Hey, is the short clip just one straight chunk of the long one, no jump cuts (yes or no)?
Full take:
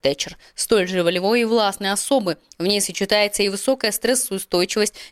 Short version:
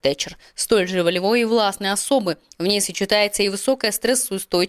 yes